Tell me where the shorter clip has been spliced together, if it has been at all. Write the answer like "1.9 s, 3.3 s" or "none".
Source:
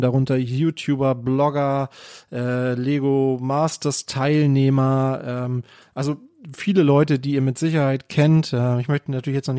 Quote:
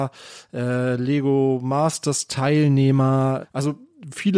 3.4 s